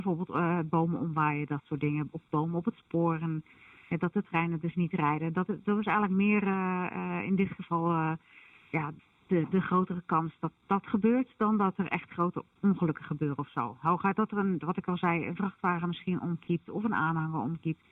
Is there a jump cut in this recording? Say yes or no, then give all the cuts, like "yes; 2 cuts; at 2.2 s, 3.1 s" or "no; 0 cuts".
no; 0 cuts